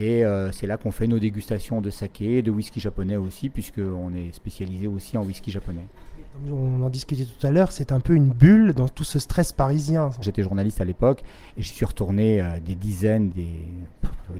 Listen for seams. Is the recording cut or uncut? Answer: cut